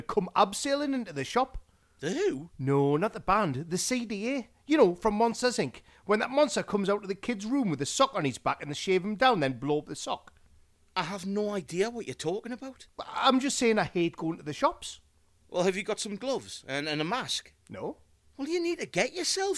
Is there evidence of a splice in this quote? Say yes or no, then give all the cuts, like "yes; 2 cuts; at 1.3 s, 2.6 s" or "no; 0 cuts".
no; 0 cuts